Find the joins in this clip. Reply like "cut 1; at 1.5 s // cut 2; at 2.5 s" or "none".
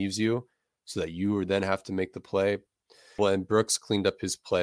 cut 1; at 3.2 s